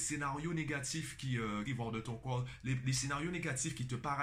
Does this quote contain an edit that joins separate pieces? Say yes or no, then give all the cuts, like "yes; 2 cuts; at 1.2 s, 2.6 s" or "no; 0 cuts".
yes; 1 cut; at 1.7 s